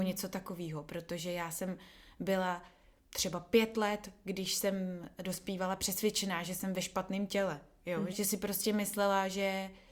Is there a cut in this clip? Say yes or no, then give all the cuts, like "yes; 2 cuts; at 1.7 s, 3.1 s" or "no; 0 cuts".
yes; 1 cut; at 8.1 s